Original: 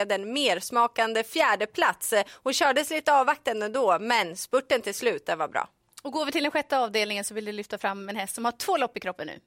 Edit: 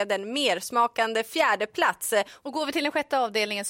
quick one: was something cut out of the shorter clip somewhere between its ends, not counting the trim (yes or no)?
yes